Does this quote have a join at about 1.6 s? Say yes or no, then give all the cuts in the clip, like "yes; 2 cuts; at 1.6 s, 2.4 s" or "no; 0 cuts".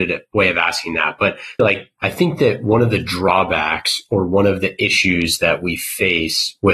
yes; 1 cut; at 1.6 s